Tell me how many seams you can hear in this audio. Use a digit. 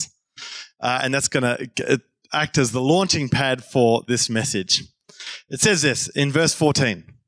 0